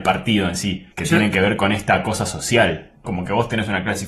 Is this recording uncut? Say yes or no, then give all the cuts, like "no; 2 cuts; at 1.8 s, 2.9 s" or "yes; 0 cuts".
no; 2 cuts; at 0.9 s, 3.0 s